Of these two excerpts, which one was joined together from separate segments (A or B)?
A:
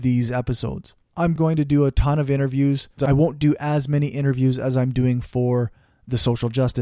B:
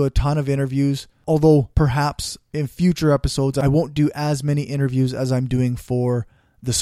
A